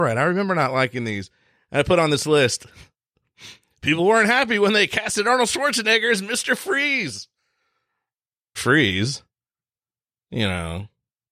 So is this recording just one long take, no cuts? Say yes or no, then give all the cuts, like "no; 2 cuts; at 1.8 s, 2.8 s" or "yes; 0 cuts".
no; 1 cut; at 8.6 s